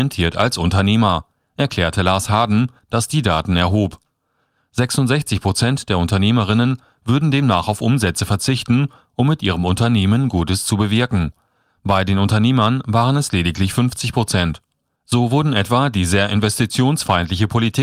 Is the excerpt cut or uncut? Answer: cut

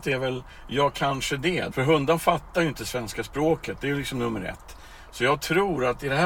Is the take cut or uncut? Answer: cut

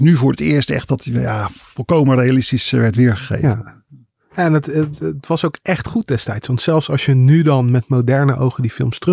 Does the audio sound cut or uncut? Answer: uncut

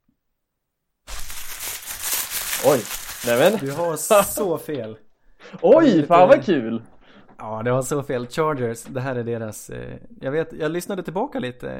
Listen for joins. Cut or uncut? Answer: uncut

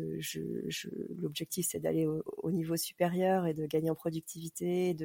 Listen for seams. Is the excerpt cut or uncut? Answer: uncut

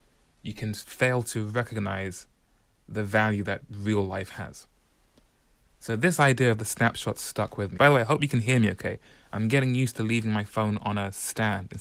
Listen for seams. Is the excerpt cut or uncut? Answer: cut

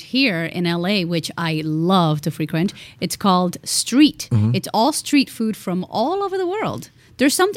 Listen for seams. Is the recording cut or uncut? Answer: uncut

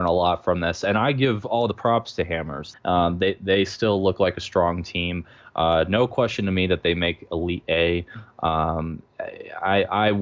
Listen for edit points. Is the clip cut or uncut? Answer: cut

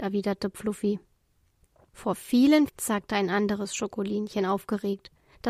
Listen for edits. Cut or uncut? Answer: cut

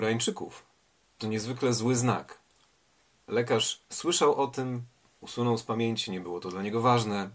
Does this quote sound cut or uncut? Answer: uncut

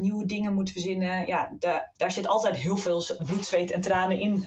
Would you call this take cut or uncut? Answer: cut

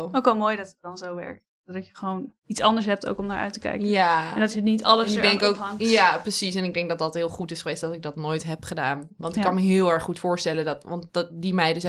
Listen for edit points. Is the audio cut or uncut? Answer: cut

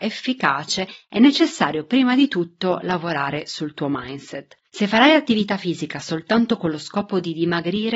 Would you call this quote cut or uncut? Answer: cut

